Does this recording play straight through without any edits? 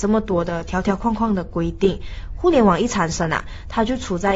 yes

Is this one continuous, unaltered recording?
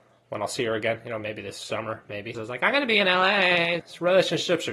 no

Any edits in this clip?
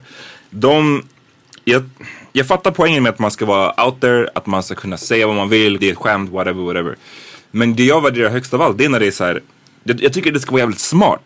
yes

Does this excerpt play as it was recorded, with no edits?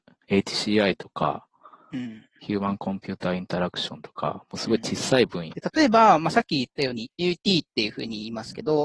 no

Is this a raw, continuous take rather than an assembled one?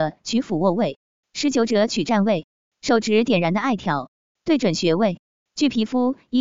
yes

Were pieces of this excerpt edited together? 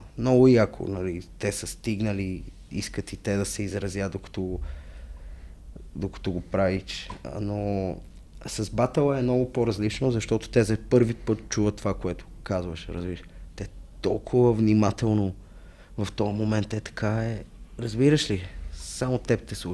no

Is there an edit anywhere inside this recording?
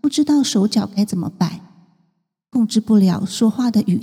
no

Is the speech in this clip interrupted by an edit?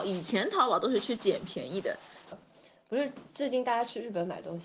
yes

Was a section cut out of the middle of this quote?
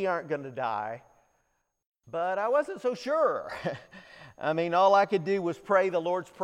no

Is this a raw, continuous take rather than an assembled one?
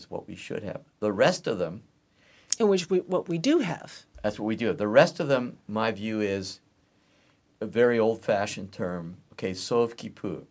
no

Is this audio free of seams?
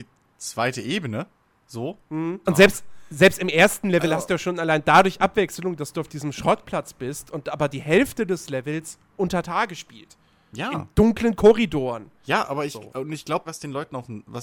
no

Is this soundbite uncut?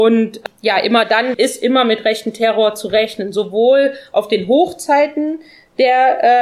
no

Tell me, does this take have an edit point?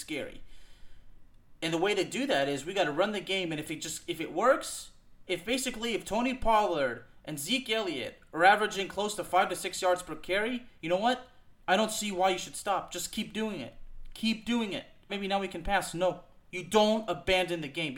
yes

